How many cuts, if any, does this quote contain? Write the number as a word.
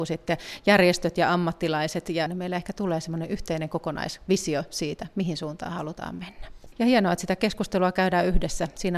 two